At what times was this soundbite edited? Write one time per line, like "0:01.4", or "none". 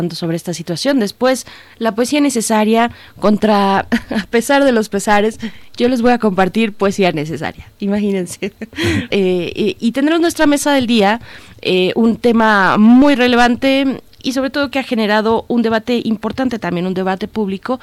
0:09.1